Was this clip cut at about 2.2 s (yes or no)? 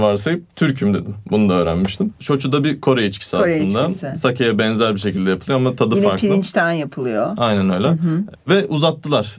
yes